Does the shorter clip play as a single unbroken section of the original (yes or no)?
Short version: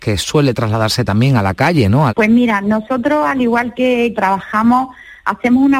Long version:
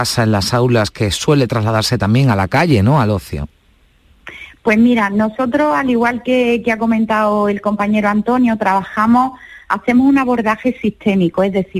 no